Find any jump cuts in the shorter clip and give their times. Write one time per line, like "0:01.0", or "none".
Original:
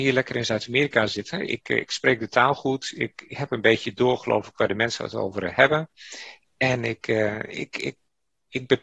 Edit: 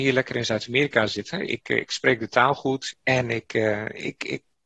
0:02.9